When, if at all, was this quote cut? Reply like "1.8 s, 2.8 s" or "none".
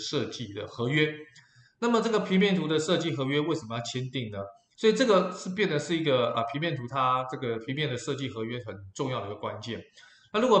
4.7 s

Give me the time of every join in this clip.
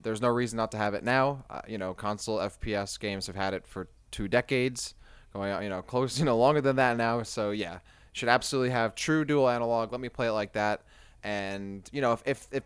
none

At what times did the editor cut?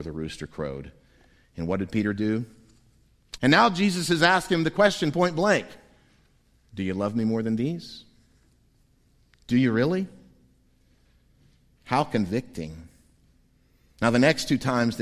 3.4 s

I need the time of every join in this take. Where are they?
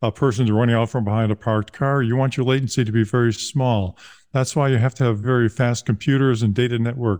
5.2 s

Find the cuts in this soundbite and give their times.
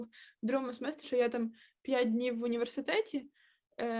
1.0 s

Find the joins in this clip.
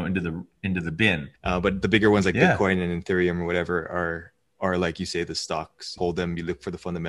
1.4 s, 6.0 s

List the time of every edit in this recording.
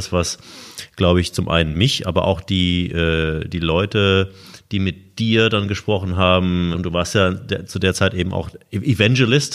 6.7 s

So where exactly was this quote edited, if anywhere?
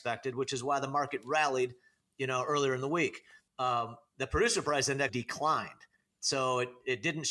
3.5 s, 5.1 s

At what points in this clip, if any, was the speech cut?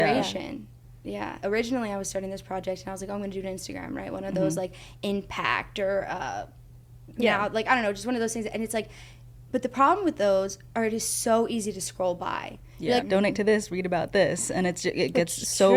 1.4 s, 13.0 s

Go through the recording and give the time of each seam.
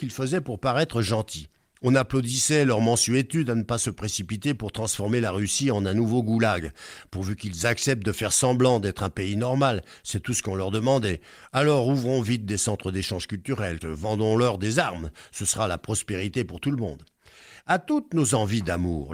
13.8 s

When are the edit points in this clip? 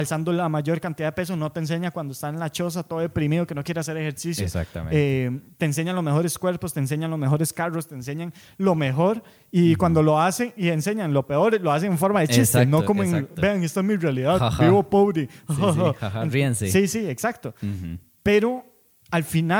none

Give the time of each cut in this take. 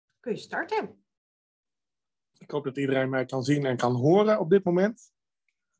2.3 s

